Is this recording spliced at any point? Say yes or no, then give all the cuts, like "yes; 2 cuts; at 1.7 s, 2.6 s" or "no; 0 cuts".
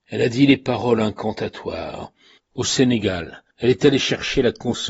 yes; 2 cuts; at 2.4 s, 3.5 s